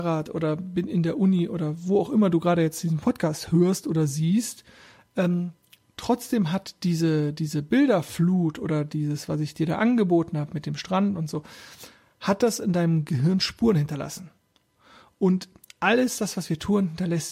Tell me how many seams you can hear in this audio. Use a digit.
0